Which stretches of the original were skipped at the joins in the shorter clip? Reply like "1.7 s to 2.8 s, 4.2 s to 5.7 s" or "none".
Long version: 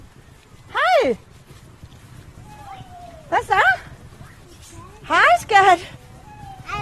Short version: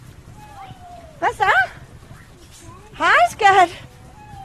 none